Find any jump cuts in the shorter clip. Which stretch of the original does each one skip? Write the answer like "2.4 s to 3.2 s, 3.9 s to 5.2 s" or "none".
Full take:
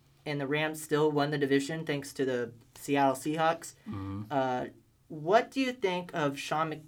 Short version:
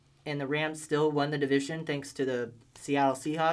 none